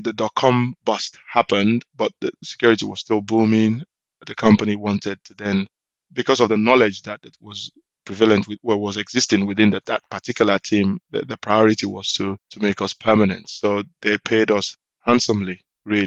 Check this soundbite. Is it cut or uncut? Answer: uncut